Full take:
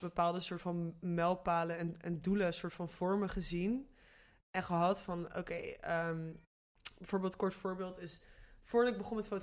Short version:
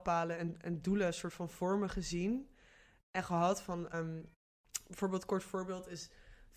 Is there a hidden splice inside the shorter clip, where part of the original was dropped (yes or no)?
yes